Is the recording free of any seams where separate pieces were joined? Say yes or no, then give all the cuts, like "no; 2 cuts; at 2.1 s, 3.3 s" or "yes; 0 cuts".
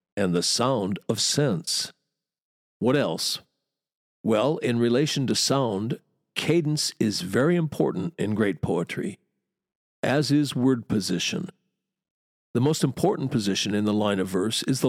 yes; 0 cuts